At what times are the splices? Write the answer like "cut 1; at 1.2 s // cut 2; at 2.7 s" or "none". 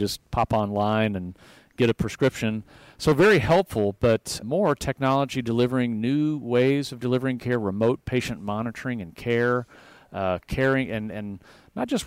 cut 1; at 4.4 s

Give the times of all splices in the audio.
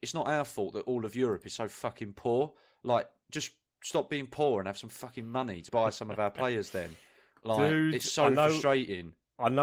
cut 1; at 5.7 s

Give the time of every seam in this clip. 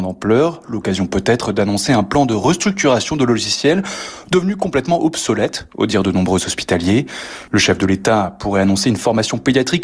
cut 1; at 7.5 s

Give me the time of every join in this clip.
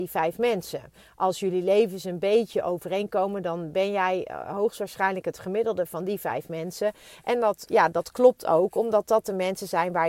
cut 1; at 7.7 s

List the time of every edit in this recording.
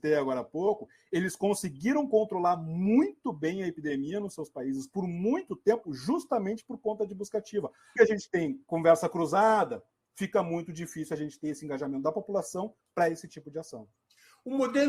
cut 1; at 8.0 s

